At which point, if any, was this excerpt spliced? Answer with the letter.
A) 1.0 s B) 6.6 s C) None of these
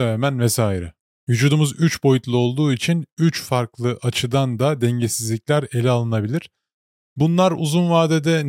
C